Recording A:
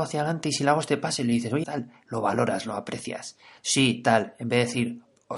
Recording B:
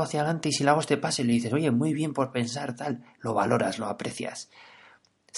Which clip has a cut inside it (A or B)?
A